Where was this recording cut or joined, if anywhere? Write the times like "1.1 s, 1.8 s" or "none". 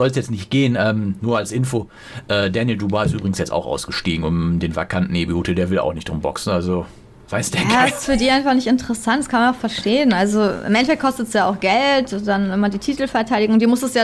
none